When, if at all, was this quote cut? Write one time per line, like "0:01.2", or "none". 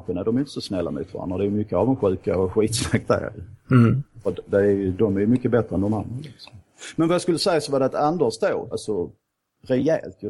0:08.7